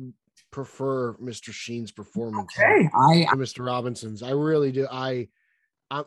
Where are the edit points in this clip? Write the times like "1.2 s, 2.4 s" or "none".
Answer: none